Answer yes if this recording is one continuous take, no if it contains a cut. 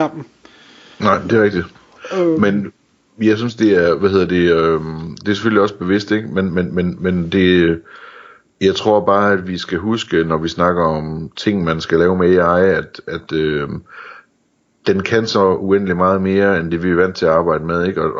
yes